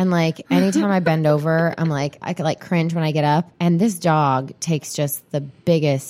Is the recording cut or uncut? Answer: cut